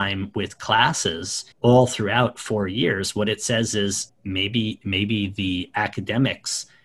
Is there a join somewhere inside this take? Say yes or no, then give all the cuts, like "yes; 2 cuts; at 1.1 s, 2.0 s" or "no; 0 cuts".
yes; 2 cuts; at 1.5 s, 4.1 s